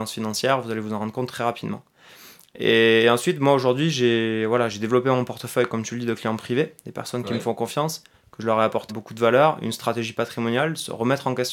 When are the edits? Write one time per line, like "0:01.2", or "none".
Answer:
0:08.9